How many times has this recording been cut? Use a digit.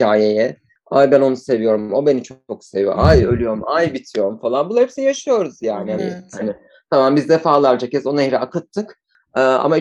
1